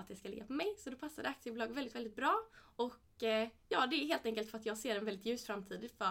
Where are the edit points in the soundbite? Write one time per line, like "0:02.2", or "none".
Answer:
none